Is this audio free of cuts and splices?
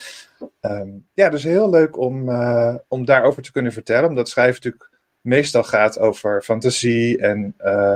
no; 1 cut; at 2.9 s

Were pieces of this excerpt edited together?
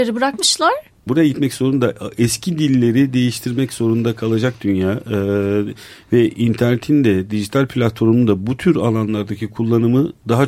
yes; 1 cut; at 1.1 s

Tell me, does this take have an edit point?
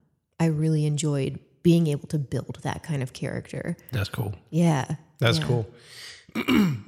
no; 0 cuts

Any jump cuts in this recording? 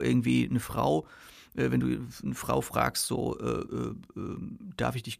no; 0 cuts

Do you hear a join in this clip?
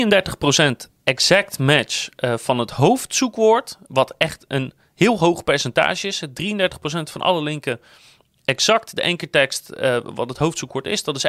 no; 0 cuts

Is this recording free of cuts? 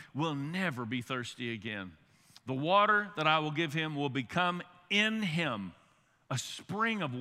yes; 0 cuts

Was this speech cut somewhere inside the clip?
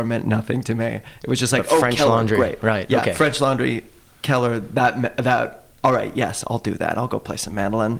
no; 0 cuts

